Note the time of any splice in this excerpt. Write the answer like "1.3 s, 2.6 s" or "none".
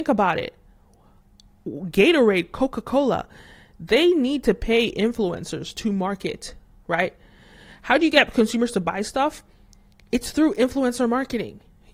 none